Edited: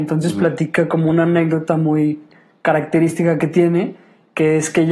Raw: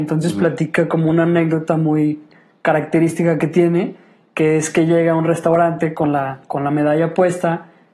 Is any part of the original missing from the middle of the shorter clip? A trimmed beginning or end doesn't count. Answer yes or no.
no